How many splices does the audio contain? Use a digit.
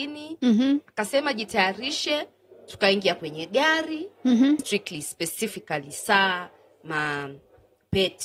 1